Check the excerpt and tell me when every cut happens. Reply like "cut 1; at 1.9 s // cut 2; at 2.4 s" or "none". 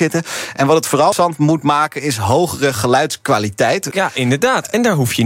cut 1; at 1.1 s // cut 2; at 3.9 s